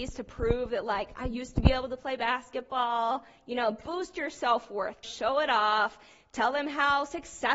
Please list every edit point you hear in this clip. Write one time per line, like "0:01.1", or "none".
0:05.0